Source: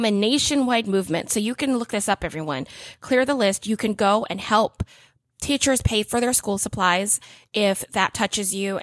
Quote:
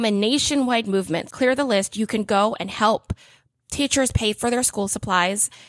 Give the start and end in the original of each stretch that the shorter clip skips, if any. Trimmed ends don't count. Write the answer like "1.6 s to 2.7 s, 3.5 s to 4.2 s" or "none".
1.3 s to 3.0 s